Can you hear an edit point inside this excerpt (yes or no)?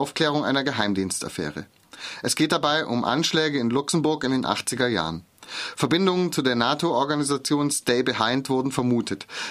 no